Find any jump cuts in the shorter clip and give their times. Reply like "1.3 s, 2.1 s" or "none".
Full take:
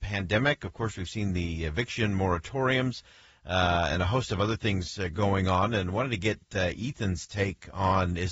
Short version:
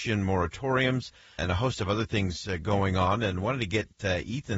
1.4 s